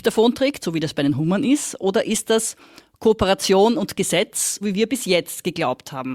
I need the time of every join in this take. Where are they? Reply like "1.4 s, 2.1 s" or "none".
4.6 s